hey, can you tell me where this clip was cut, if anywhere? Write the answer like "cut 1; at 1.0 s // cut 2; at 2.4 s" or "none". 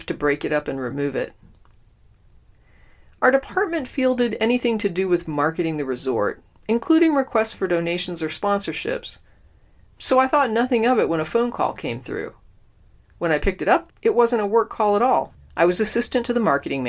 cut 1; at 13.9 s // cut 2; at 15.4 s